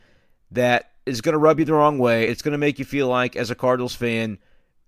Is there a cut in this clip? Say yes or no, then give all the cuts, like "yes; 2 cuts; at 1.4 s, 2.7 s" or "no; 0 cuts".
no; 0 cuts